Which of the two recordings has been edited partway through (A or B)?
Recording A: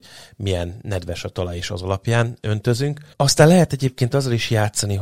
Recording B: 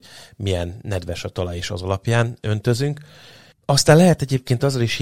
A